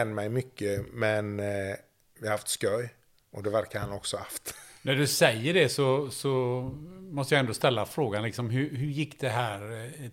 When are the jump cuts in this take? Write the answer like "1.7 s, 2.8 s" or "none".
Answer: none

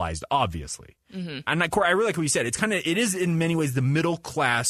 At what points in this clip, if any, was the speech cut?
none

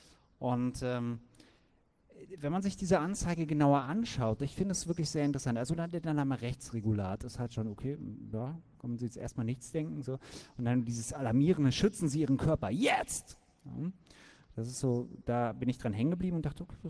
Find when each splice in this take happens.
none

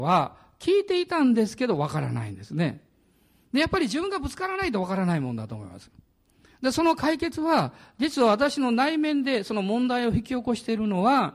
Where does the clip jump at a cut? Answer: none

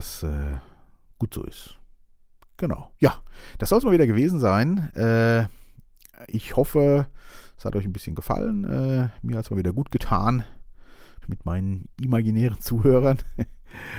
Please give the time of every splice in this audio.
3.0 s, 11.2 s

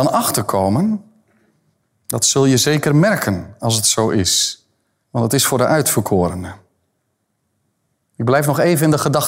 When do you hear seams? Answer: 5.0 s

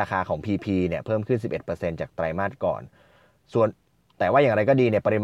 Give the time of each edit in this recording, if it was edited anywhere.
none

